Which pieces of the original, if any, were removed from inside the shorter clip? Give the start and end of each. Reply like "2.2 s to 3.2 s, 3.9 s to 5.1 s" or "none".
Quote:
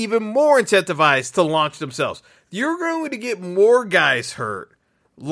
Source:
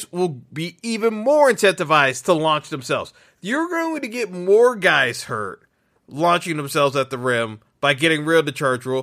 none